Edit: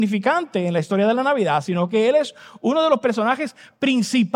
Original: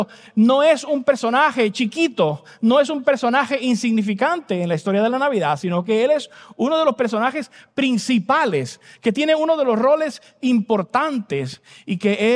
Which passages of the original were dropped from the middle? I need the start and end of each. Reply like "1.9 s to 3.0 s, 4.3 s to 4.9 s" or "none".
none